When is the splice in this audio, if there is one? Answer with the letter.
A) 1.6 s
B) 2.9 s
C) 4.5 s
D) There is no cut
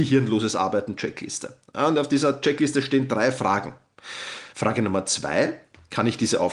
C